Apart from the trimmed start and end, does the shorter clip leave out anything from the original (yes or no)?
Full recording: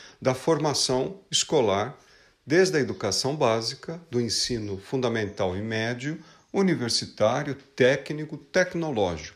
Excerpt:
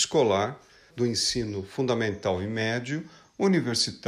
yes